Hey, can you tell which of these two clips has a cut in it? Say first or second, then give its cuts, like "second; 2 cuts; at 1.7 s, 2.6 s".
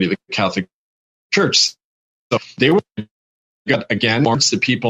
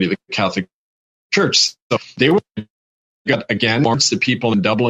second; 1 cut; at 1.8 s